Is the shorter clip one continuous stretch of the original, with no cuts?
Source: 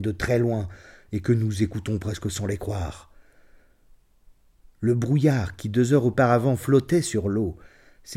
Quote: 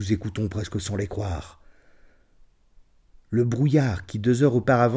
yes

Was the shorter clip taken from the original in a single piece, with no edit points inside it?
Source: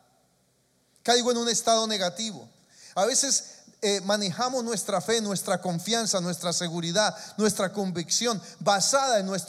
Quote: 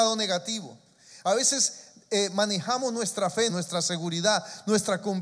no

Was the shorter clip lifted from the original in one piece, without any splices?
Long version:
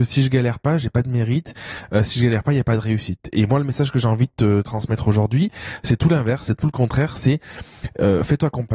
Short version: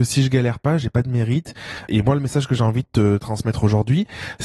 no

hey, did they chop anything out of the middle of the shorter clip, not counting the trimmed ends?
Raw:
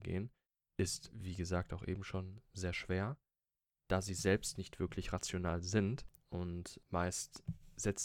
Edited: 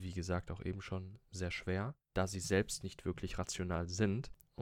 yes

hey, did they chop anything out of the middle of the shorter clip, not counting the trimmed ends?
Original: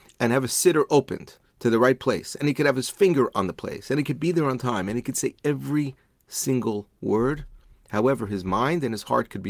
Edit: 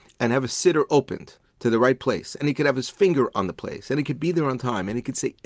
no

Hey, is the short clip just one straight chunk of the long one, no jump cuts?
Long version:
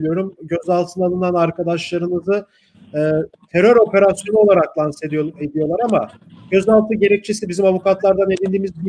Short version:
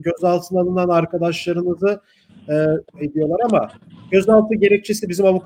no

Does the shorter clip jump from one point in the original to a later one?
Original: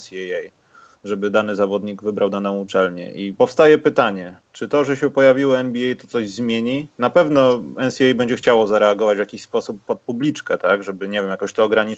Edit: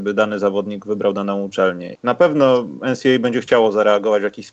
yes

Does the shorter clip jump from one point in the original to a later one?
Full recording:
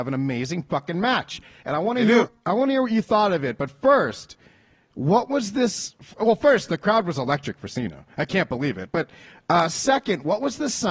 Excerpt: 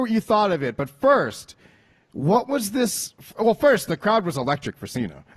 no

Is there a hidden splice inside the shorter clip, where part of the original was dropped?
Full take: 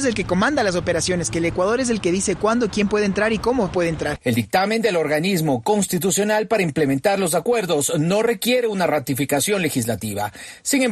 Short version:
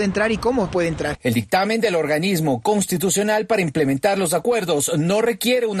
no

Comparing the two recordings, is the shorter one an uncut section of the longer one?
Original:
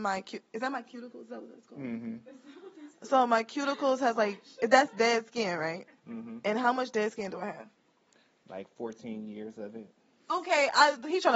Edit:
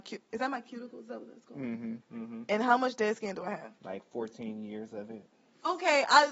no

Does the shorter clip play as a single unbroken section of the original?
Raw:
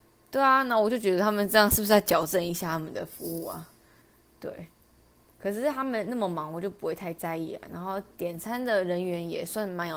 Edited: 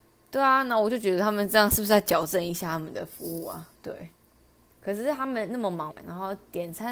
no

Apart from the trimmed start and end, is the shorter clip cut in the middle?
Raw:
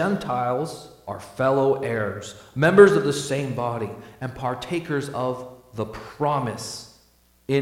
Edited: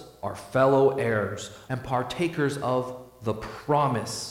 yes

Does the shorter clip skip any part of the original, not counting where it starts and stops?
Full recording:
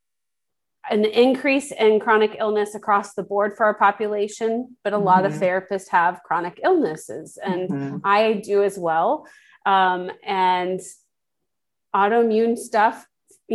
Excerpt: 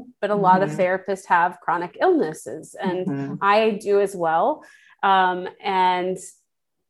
no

